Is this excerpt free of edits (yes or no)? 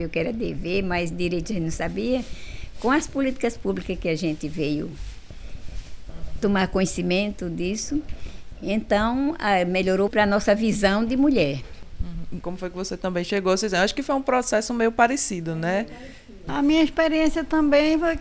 no